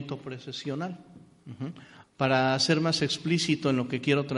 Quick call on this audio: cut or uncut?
cut